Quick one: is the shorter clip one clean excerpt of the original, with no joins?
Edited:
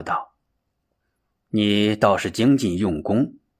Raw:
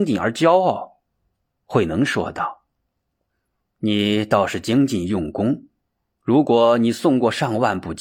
yes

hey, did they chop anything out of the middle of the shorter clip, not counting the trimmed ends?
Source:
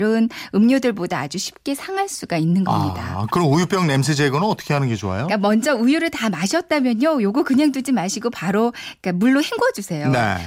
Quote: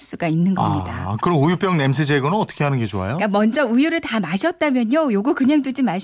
no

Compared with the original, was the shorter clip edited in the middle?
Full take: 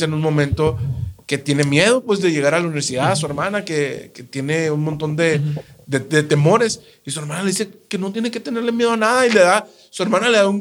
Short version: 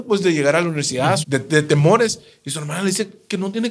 yes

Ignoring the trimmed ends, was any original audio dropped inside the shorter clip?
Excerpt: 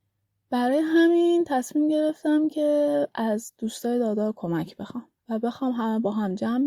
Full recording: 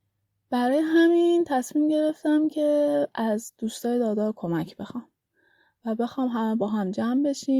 yes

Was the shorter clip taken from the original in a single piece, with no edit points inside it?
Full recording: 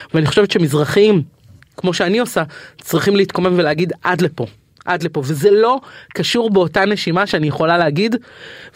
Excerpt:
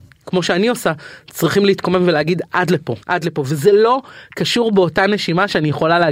no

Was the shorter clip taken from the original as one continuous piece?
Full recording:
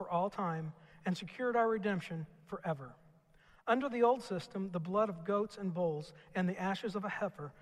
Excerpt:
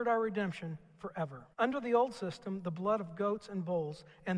no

